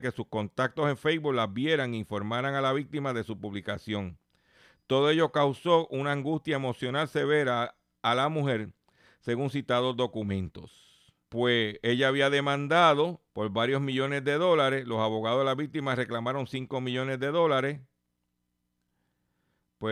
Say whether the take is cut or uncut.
cut